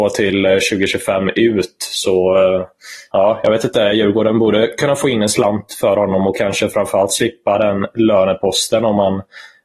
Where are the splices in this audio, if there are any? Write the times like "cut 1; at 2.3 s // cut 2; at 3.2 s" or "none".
cut 1; at 3.1 s